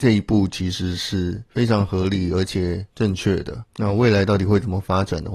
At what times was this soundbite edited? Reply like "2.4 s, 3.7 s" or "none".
3.7 s